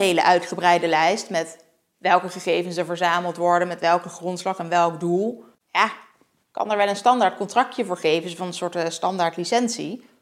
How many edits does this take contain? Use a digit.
1